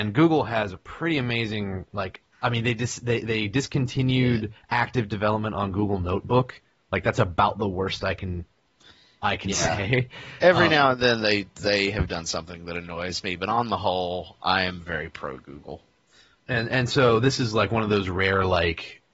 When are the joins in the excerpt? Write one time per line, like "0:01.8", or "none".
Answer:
0:02.3